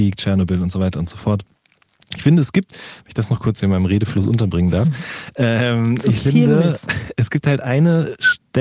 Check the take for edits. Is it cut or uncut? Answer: uncut